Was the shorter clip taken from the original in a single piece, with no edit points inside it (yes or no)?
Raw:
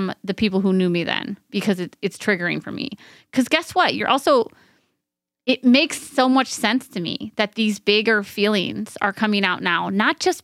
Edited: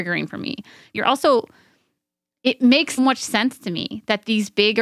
no